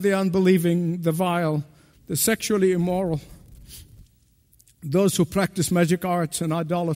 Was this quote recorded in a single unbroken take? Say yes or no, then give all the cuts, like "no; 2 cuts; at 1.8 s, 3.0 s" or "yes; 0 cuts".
no; 1 cut; at 1.9 s